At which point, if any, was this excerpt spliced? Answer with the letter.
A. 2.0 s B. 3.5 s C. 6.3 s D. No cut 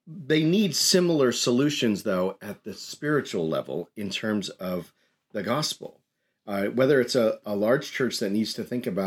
D